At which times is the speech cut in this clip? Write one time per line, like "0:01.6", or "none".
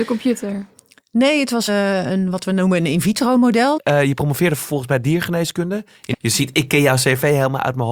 0:01.7
0:03.8
0:06.1